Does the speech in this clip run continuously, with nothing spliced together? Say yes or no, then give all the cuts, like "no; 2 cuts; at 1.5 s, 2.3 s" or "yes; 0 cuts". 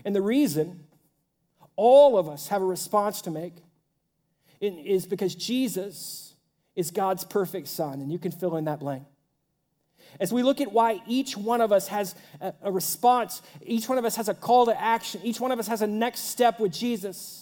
yes; 0 cuts